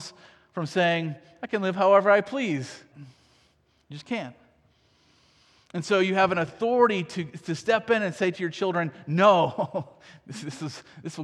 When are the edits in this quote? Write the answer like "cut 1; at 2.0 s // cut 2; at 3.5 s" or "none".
cut 1; at 2.9 s